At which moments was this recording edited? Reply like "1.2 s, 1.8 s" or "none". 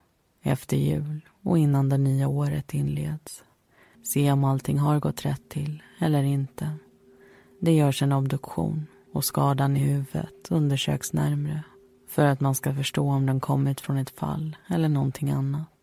3.9 s

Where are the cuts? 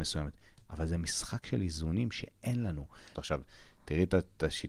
3.1 s

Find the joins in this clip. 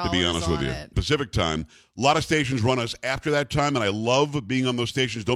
0.9 s

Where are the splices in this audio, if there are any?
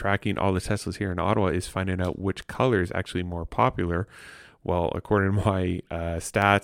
4.4 s

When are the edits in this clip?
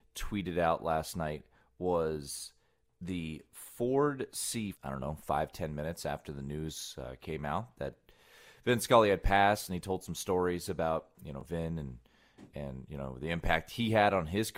4.7 s

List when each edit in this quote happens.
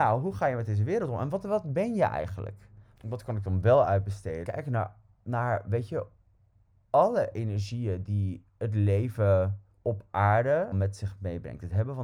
3.0 s, 4.4 s

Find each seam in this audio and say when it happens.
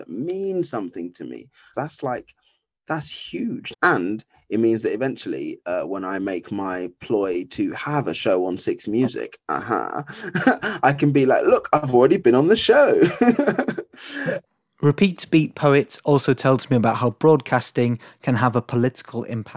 1.7 s, 3.7 s, 14.5 s

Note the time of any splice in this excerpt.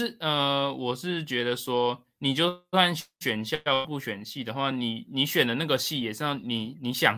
none

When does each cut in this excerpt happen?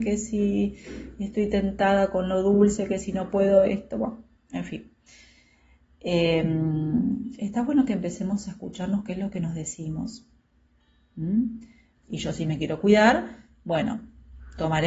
12.0 s

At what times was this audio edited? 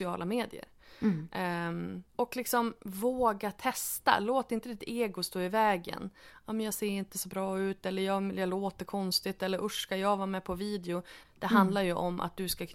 2.1 s, 11.2 s

